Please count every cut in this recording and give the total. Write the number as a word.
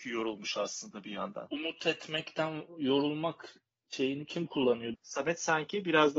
two